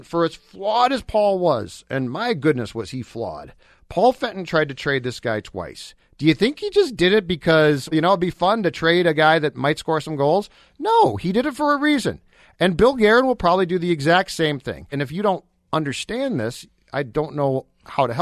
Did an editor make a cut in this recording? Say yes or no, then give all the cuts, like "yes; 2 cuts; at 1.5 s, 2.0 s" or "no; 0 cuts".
yes; 2 cuts; at 7.9 s, 14.9 s